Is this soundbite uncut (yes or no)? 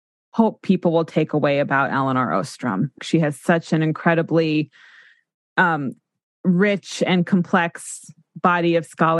no